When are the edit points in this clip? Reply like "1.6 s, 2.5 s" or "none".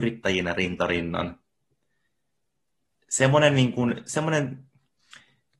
none